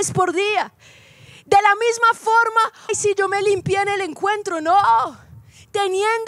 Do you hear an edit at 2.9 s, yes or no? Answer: yes